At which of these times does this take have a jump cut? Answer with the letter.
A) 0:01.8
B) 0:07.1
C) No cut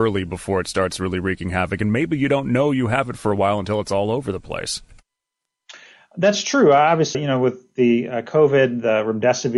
B